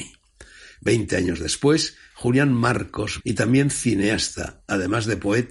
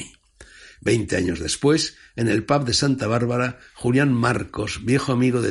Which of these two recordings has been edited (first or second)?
first